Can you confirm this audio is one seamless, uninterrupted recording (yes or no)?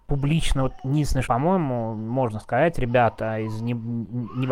no